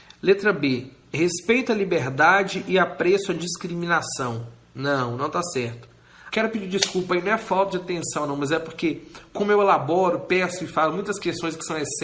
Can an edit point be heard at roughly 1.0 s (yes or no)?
no